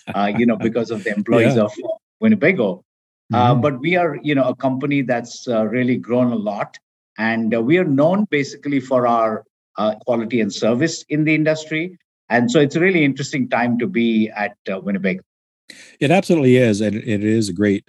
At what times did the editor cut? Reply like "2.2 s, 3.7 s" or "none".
10.0 s